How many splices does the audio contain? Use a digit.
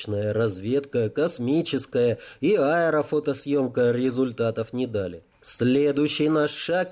1